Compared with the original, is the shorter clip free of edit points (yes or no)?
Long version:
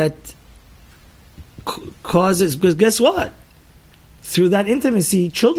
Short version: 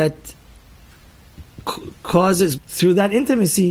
no